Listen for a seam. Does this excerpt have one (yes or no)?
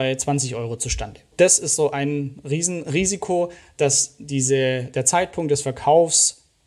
no